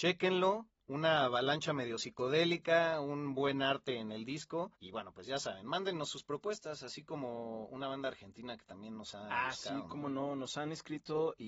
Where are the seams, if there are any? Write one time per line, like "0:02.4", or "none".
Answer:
0:04.7